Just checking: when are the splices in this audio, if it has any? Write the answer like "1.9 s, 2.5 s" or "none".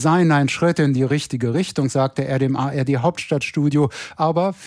none